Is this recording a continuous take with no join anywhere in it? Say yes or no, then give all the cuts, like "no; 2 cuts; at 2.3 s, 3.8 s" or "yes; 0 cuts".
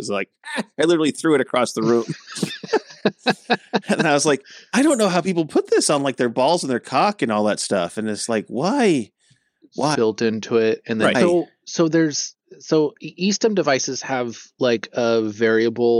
no; 2 cuts; at 9.9 s, 11.1 s